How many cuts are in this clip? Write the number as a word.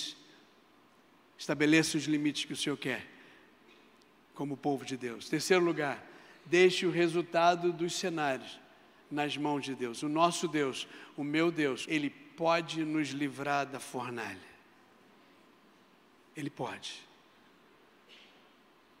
one